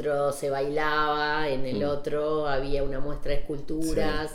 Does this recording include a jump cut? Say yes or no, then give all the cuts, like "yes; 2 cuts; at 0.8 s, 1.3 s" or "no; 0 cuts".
no; 0 cuts